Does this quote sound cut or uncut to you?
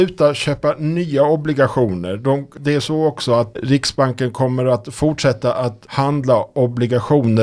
uncut